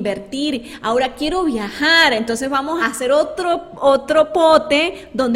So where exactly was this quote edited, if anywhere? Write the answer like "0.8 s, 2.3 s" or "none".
2.8 s